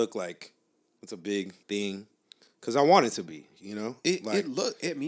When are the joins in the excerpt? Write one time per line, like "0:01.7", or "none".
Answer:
0:01.6